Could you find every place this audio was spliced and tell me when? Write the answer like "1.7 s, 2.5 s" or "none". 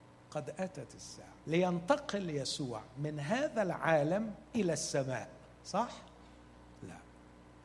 1.4 s